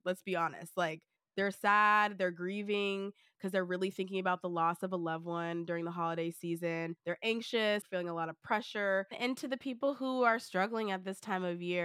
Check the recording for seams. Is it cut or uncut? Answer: uncut